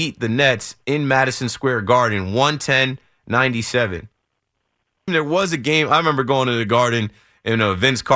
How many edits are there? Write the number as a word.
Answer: one